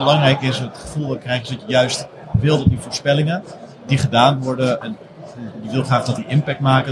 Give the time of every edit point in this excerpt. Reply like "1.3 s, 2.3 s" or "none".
4.8 s